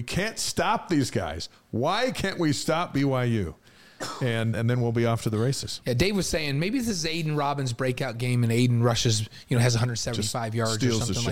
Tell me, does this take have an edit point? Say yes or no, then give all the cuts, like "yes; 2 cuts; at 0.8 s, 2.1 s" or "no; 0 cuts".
yes; 1 cut; at 4.5 s